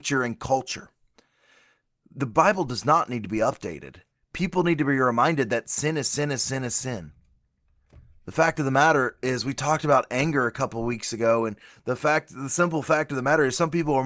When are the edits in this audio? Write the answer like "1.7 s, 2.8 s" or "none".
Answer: none